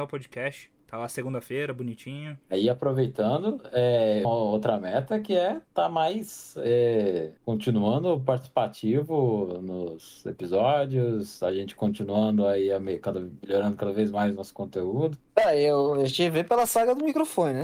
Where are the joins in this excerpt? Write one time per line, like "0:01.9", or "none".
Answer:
0:04.2
0:15.3